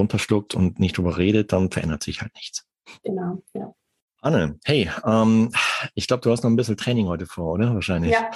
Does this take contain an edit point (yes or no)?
no